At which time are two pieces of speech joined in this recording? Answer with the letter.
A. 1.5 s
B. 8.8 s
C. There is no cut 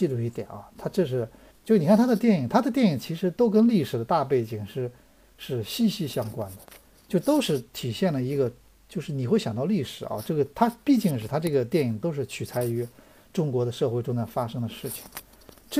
A